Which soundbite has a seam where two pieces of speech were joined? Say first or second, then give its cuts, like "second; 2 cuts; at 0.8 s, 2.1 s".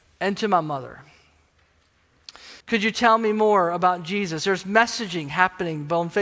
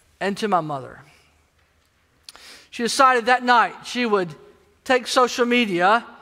first; 1 cut; at 2.6 s